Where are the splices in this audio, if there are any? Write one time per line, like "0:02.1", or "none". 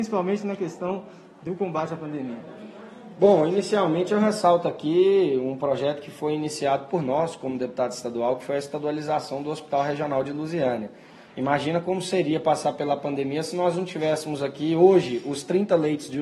none